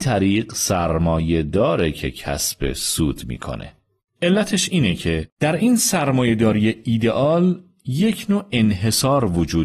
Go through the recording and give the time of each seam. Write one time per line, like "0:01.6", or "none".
0:04.1